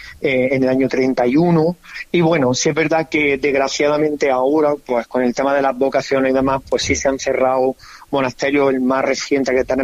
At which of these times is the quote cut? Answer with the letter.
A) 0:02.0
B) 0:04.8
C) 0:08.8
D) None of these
D